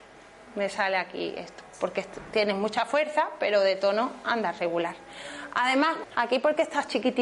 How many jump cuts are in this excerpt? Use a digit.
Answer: 1